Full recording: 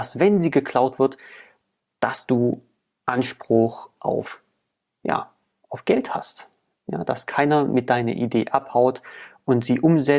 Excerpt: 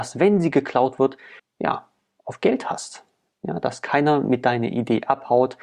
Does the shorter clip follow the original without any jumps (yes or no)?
no